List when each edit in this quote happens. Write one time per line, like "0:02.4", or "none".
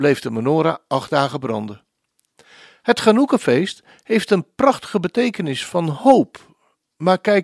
none